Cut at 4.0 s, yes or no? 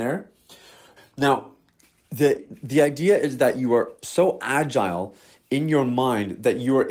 no